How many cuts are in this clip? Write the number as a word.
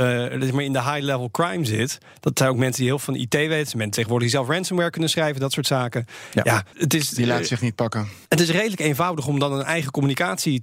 two